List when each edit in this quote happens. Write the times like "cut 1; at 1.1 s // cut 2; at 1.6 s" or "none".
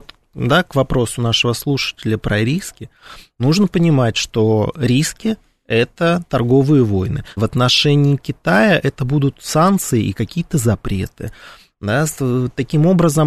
cut 1; at 7.4 s